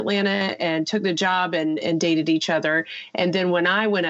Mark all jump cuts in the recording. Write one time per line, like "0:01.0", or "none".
0:01.8

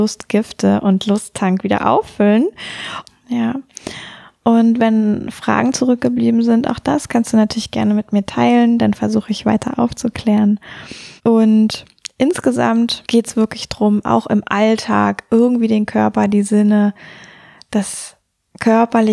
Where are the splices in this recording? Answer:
0:03.1
0:11.2

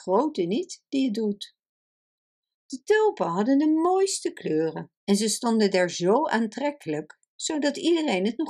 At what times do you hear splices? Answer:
0:05.0

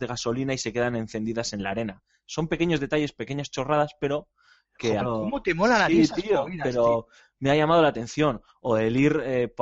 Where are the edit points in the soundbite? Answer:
0:05.0

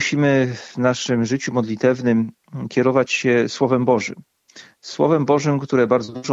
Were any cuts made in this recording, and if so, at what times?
none

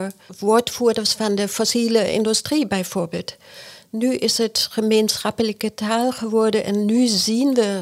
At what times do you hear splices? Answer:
none

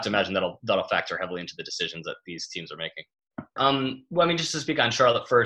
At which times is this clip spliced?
0:03.6

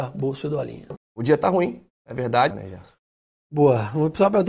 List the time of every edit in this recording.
0:01.0
0:02.5

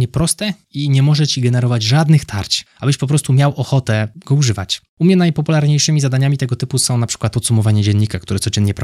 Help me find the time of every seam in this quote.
0:04.9
0:07.3

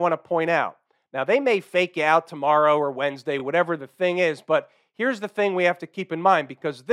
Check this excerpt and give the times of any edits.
none

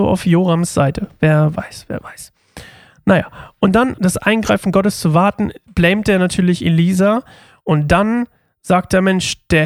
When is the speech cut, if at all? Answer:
0:04.0

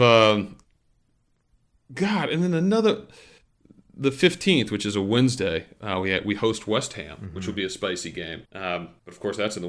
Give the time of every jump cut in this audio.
0:08.4

